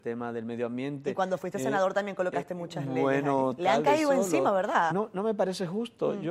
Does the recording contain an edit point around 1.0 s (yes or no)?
no